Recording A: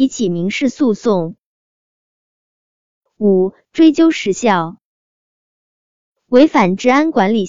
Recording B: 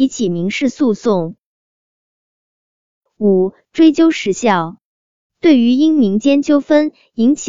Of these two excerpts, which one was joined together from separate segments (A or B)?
B